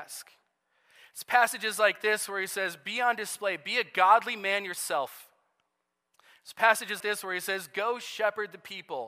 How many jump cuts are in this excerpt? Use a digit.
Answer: 1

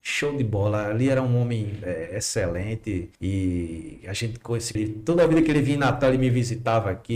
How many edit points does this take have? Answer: 2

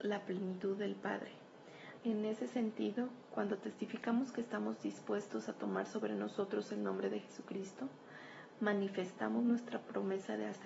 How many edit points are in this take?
1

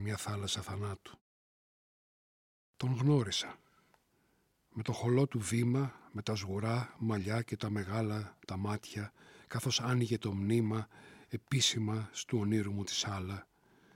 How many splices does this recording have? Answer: 0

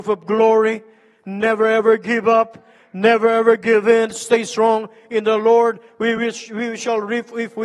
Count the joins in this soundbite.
0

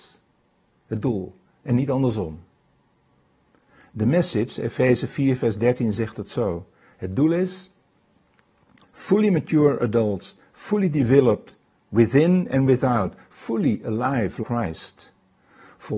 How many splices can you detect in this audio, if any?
1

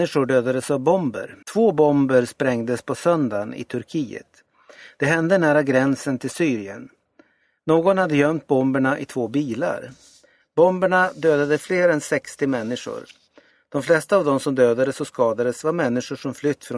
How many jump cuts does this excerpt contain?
1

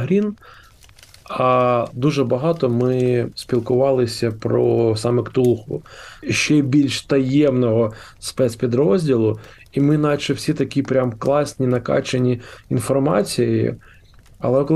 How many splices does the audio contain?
1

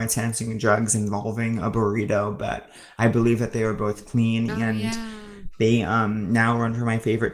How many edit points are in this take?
1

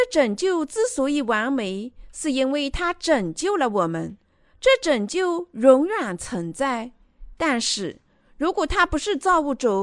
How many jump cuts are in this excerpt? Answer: 0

